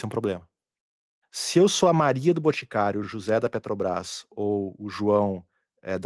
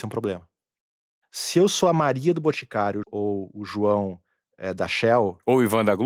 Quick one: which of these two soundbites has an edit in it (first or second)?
second